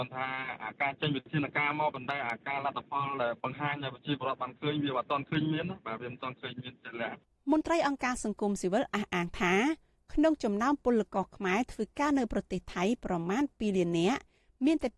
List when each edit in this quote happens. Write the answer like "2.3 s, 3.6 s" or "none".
none